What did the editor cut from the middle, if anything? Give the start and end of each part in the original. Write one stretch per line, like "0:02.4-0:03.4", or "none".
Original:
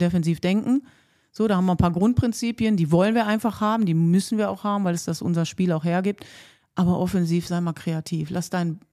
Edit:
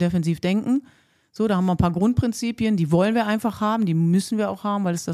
none